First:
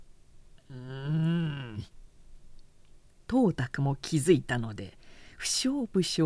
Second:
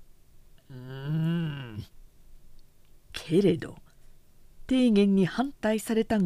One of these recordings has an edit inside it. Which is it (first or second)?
second